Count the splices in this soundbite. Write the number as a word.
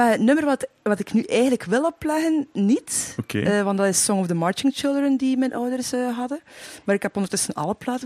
zero